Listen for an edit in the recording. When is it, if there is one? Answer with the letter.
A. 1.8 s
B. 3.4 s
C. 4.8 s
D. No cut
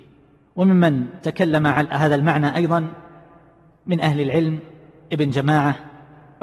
A